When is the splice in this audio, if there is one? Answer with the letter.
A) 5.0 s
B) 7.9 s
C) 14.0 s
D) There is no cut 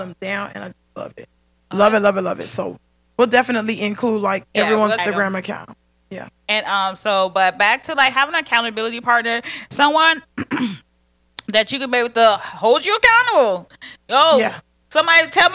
A